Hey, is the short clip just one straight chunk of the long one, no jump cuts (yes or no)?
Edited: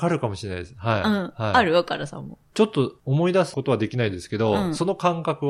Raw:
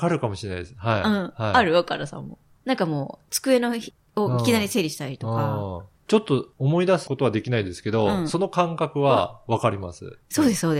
no